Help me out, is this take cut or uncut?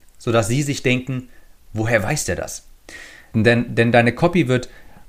cut